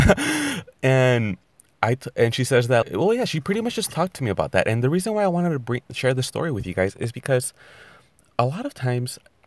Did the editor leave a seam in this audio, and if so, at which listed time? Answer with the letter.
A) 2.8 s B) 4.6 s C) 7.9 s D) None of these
A